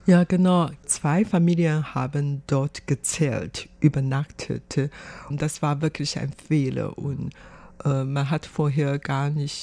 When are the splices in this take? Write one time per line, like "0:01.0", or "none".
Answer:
0:05.3